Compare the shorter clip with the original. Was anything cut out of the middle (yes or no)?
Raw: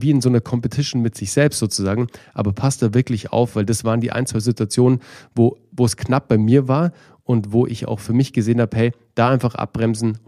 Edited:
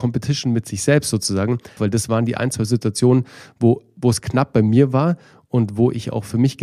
yes